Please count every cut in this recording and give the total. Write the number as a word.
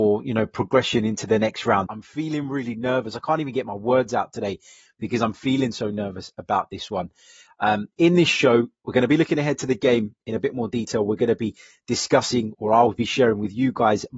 one